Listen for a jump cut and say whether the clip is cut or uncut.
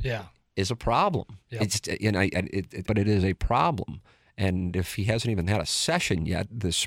cut